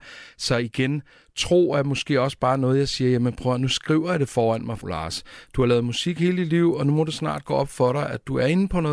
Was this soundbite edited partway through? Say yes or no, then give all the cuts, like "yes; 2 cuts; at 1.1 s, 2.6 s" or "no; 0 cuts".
yes; 1 cut; at 4.8 s